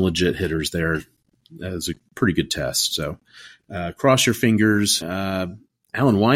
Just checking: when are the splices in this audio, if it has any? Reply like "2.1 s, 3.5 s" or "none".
5.0 s